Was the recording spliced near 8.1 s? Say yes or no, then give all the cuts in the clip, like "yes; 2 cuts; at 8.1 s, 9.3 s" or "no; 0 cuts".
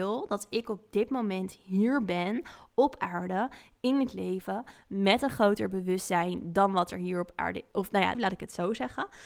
yes; 1 cut; at 8.1 s